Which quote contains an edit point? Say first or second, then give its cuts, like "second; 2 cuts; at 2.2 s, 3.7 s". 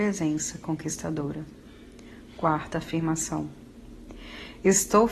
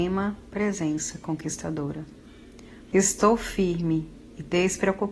second; 1 cut; at 2.9 s